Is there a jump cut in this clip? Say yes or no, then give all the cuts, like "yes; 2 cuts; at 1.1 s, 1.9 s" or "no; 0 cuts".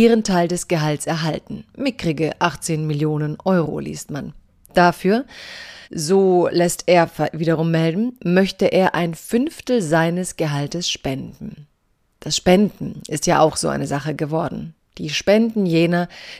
yes; 1 cut; at 5.8 s